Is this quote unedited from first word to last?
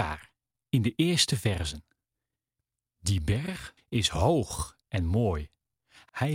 no; 1 cut; at 3.8 s

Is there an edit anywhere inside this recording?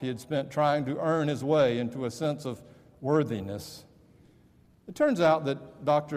yes; 1 cut; at 4.7 s

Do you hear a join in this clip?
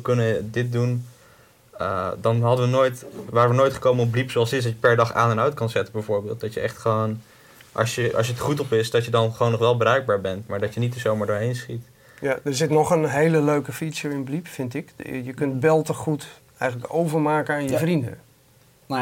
no; 0 cuts

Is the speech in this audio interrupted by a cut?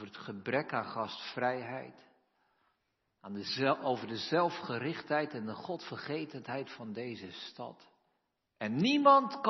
yes; 1 cut; at 8.5 s

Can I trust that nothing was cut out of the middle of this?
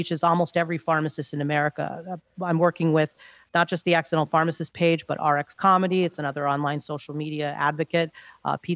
yes; 0 cuts

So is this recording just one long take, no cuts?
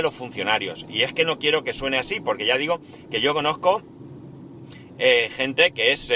yes; 0 cuts

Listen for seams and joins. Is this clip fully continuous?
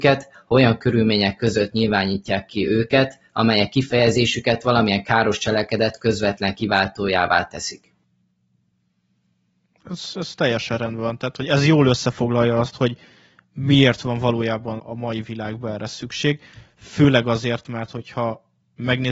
no; 1 cut; at 14.8 s

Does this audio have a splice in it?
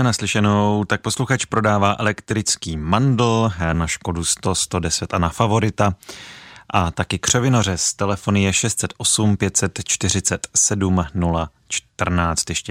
yes; 1 cut; at 3.7 s

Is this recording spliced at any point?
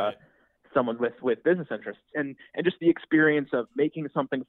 yes; 1 cut; at 2.1 s

